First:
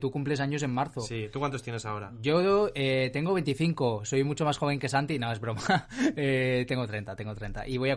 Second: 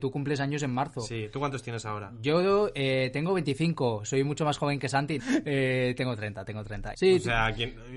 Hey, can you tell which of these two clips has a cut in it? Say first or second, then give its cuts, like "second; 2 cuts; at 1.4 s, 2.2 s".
second; 2 cuts; at 5.2 s, 6.9 s